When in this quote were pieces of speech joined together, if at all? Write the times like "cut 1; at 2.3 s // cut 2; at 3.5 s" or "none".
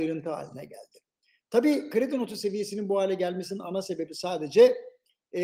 none

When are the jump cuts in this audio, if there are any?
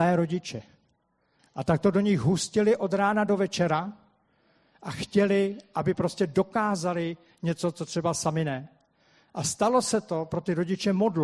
cut 1; at 1.4 s

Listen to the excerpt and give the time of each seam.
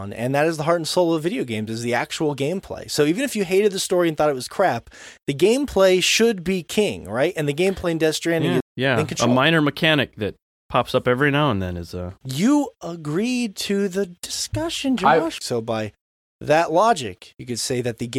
cut 1; at 8.6 s // cut 2; at 15.4 s

